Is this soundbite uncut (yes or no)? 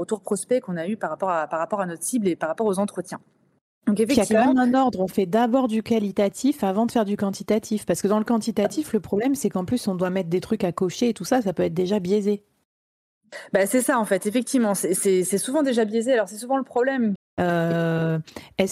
no